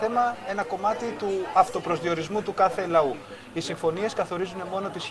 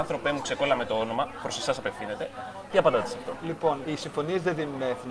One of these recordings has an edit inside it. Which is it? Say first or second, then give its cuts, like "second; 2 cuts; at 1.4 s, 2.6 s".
second; 1 cut; at 2.7 s